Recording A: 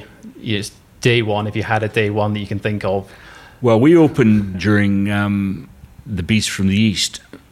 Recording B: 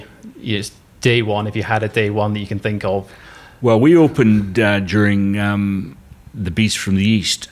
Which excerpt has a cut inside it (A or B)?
A